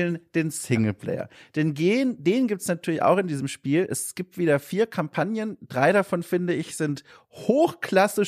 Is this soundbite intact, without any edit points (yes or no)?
yes